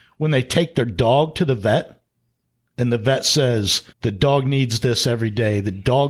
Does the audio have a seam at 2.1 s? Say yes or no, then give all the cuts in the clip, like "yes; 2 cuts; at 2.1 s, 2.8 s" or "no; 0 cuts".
no; 1 cut; at 3.9 s